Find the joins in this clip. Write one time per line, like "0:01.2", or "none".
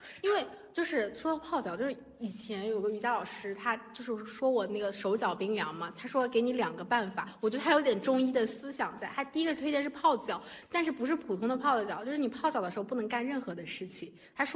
none